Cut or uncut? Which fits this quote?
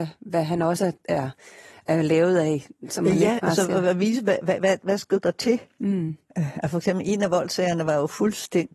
uncut